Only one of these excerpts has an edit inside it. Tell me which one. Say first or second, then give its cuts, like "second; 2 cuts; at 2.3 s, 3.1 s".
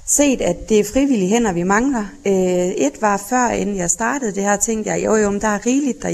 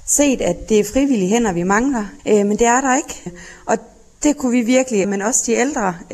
second; 3 cuts; at 2.2 s, 3.3 s, 5.0 s